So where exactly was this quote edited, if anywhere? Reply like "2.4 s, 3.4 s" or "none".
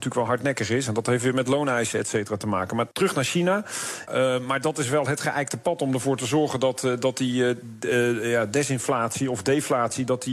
2.9 s, 4.1 s